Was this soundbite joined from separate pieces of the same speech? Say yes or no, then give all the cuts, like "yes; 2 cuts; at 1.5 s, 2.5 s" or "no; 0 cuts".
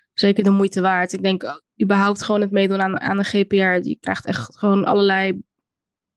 no; 0 cuts